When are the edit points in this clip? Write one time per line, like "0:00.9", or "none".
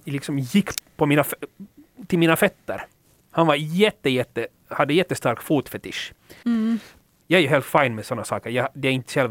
0:06.4